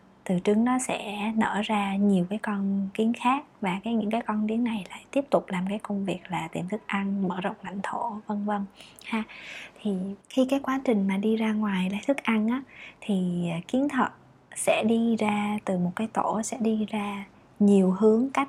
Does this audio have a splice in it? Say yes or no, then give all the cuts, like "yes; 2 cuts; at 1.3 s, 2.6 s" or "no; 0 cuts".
yes; 1 cut; at 10.2 s